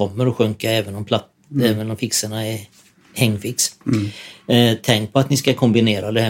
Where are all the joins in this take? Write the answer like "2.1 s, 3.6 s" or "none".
none